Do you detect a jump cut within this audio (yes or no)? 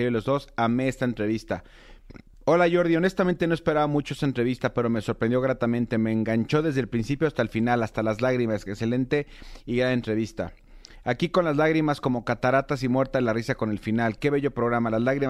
no